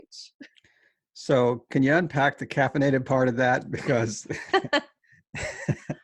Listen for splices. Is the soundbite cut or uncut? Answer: uncut